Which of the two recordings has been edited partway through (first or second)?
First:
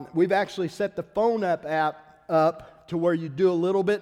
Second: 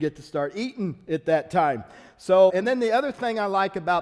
second